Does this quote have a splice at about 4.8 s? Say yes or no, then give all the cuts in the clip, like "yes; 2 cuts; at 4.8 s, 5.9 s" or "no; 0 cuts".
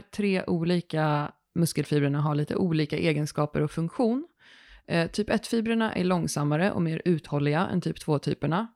no; 0 cuts